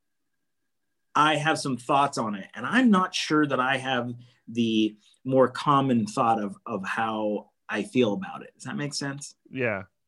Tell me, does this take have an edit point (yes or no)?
no